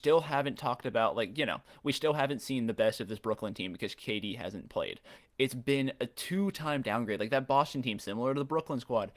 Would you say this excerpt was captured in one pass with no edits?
no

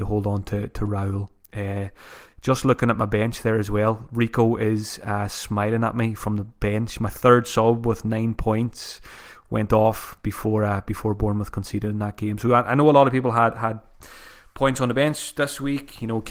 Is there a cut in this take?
no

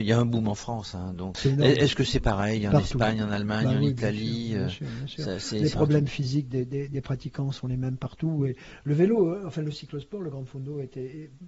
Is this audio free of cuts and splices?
yes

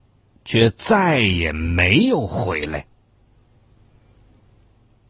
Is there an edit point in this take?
no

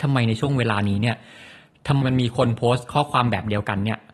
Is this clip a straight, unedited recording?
no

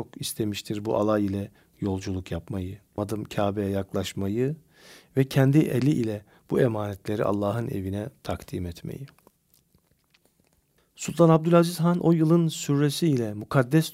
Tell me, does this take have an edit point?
yes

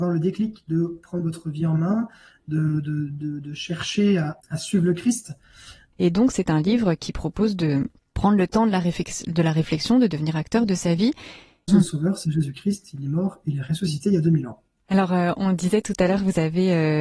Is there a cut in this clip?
yes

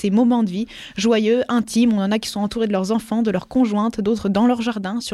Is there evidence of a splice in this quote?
no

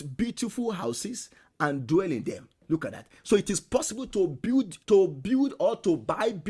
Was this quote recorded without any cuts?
no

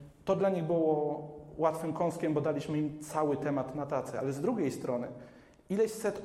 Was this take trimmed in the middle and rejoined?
no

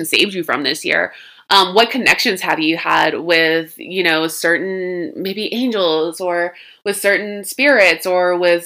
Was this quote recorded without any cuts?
yes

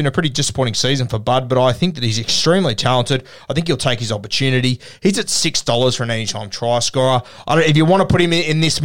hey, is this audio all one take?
yes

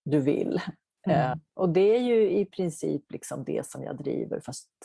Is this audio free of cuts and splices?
no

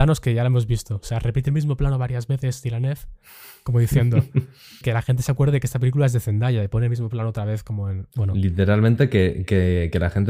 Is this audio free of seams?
no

